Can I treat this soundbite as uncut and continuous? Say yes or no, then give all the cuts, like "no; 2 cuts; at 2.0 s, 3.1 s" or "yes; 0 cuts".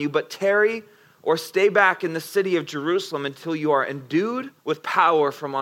no; 1 cut; at 4.6 s